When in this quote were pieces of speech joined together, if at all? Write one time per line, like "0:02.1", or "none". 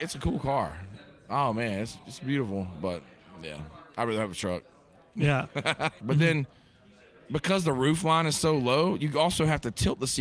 0:06.0